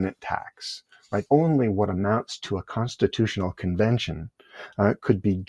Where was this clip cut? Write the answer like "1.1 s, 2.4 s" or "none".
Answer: 1.3 s